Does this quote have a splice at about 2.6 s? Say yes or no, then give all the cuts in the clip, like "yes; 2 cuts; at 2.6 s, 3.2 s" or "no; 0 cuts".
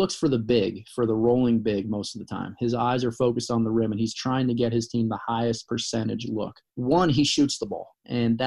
no; 1 cut; at 6.7 s